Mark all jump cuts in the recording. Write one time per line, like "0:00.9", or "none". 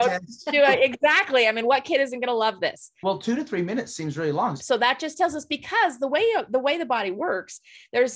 0:03.0
0:04.6